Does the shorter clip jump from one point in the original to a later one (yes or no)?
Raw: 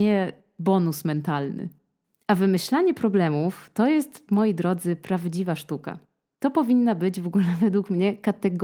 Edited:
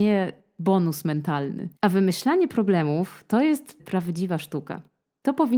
yes